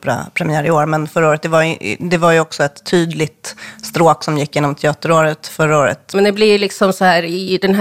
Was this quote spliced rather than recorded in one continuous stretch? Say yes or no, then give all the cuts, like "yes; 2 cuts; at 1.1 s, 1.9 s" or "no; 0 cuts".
yes; 1 cut; at 6.1 s